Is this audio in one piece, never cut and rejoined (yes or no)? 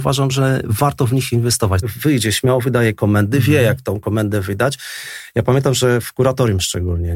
no